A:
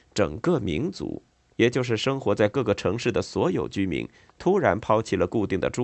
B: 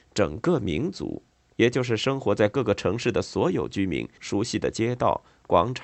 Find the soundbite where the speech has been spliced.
B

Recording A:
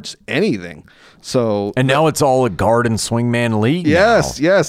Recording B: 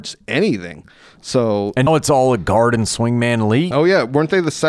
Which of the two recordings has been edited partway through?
B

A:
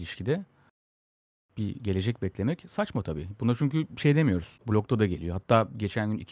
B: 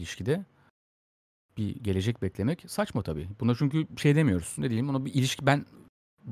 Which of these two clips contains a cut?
A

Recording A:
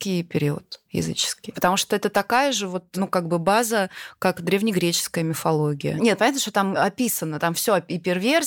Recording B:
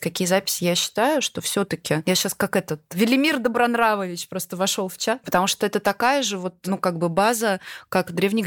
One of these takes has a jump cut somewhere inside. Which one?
B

